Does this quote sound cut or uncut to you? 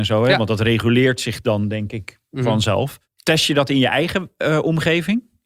uncut